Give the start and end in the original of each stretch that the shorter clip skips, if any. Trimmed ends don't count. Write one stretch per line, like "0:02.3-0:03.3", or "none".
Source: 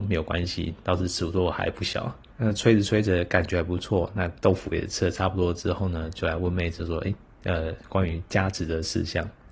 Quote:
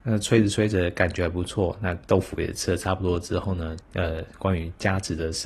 0:06.1-0:07.3